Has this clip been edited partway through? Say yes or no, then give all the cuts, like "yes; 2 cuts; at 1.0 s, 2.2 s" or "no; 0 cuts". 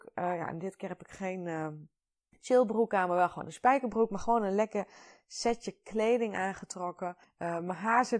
no; 0 cuts